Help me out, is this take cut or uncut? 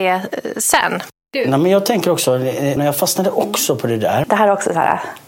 cut